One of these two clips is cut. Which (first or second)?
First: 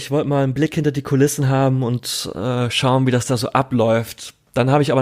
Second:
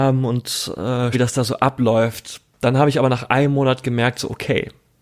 second